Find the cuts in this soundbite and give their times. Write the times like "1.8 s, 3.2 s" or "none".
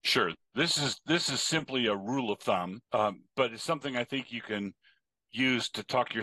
2.9 s